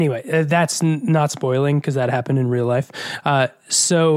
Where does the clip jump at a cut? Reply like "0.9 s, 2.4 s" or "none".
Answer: none